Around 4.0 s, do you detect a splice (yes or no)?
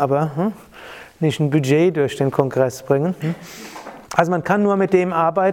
yes